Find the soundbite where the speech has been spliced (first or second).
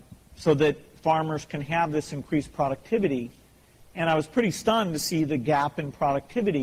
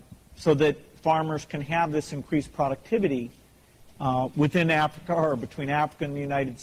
second